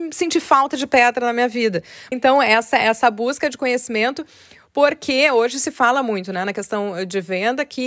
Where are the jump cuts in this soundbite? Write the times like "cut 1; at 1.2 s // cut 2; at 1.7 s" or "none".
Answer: cut 1; at 2.1 s